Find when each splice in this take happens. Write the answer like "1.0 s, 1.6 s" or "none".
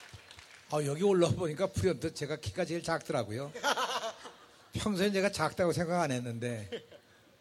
none